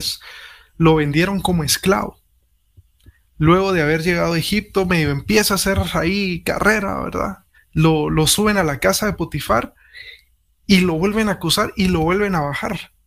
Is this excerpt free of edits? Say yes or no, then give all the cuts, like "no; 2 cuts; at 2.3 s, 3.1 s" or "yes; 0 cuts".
no; 1 cut; at 7.5 s